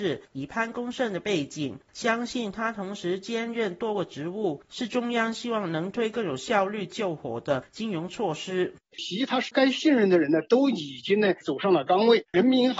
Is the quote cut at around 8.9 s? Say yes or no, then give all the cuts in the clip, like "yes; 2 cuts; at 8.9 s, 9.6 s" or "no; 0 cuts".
yes; 1 cut; at 8.9 s